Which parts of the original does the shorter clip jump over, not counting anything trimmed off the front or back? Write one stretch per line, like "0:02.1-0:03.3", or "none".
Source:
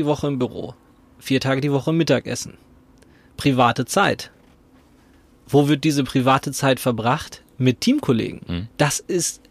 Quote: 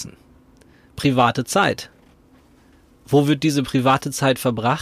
none